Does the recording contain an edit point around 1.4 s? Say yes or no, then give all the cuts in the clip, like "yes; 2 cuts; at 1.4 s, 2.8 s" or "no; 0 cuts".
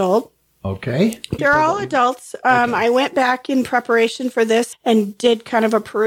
yes; 2 cuts; at 1.4 s, 4.7 s